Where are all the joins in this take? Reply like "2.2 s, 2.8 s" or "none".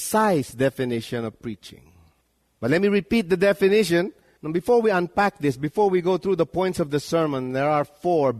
2.4 s, 4.4 s